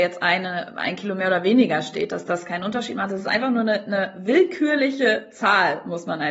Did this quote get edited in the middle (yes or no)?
no